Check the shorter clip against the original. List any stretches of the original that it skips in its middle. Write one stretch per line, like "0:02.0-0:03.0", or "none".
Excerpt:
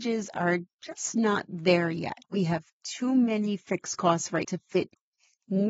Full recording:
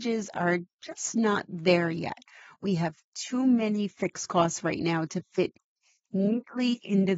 0:02.2-0:02.6
0:04.8-0:05.1